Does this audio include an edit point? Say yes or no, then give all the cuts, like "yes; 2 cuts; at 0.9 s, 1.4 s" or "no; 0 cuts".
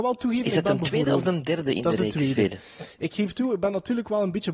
yes; 1 cut; at 2.4 s